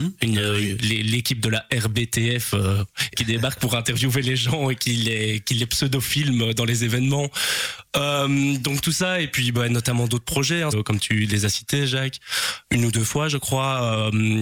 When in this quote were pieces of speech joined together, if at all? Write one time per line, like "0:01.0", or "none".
0:03.1
0:10.7